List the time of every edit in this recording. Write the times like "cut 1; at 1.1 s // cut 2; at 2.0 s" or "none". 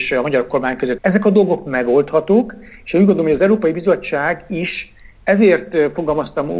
cut 1; at 1.0 s